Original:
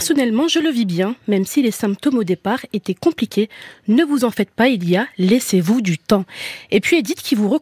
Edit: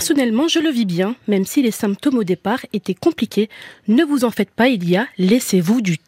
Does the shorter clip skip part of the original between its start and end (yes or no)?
no